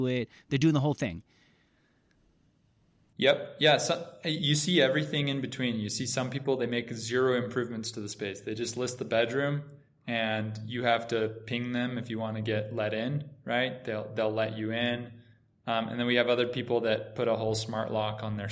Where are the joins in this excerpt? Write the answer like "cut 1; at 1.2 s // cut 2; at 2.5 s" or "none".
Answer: none